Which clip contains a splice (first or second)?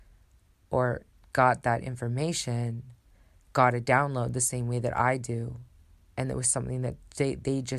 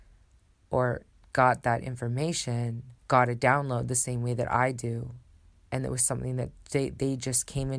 second